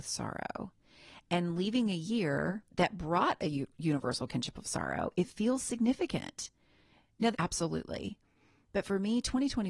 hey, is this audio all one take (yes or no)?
no